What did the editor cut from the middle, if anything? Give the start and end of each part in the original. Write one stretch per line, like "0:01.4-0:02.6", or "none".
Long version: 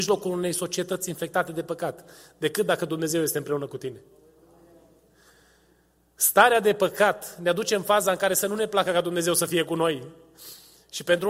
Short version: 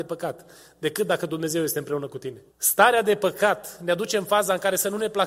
0:04.1-0:06.1